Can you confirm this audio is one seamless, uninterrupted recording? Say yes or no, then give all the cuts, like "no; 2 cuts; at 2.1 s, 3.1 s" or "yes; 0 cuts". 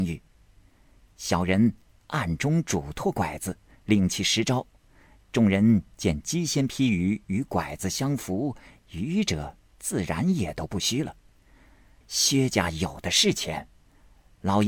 yes; 0 cuts